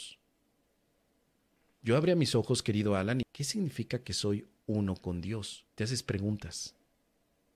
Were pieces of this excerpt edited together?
yes; 2 cuts; at 3.2 s, 5.7 s

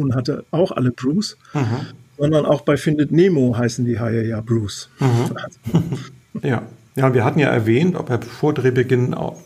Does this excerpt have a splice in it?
yes; 2 cuts; at 6.3 s, 7.9 s

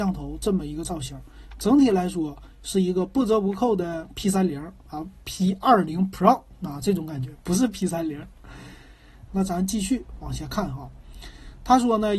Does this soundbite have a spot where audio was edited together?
yes; 1 cut; at 9.3 s

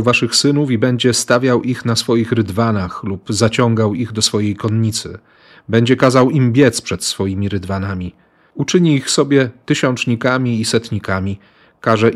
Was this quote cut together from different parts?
no; 0 cuts

